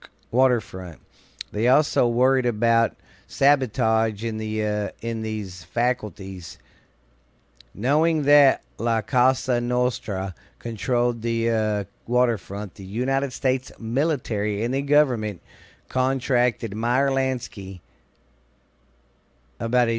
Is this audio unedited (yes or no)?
yes